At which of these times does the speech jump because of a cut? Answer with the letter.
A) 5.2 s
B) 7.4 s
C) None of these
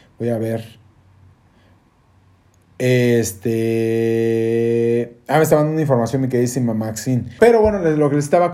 B